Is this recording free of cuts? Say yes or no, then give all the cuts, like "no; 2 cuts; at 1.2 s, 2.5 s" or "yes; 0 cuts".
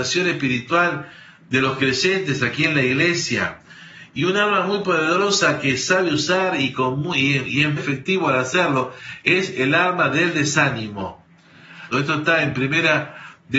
no; 2 cuts; at 7.8 s, 11.9 s